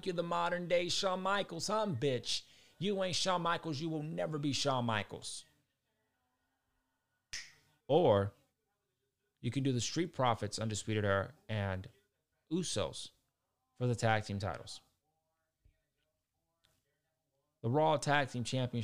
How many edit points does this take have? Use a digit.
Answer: 1